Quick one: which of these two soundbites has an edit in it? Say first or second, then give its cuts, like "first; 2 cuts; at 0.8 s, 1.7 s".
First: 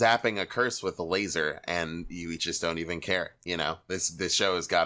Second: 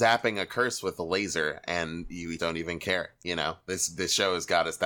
second; 1 cut; at 2.4 s